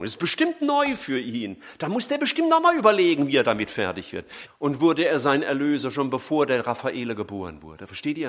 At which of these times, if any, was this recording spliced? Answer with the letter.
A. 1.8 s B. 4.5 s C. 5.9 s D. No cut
B